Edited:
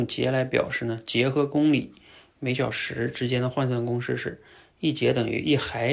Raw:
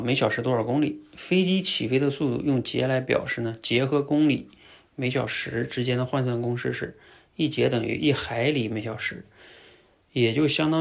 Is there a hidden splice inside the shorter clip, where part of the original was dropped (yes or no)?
no